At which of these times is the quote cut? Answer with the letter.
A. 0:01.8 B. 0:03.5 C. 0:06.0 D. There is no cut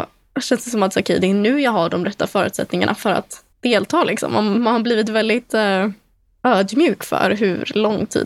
B